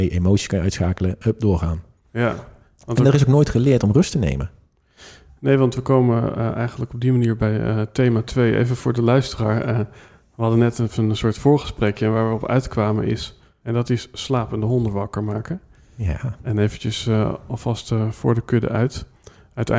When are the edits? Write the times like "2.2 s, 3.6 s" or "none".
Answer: 13.6 s